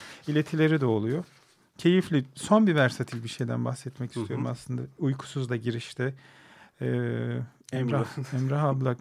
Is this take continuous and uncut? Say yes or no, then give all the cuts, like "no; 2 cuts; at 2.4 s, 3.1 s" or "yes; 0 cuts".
yes; 0 cuts